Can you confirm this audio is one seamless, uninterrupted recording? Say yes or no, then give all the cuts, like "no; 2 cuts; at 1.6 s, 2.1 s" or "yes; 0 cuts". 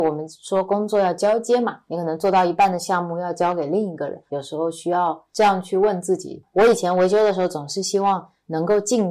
no; 1 cut; at 4.3 s